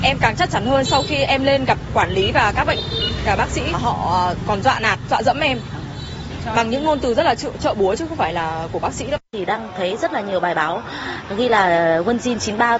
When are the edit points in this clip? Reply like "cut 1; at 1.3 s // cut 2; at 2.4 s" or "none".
cut 1; at 9.2 s